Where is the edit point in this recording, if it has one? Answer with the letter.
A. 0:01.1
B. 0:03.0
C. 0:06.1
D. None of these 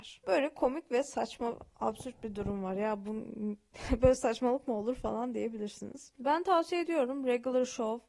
C